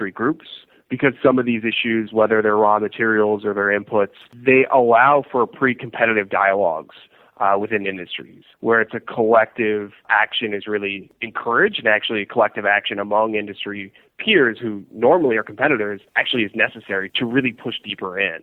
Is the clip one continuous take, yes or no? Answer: no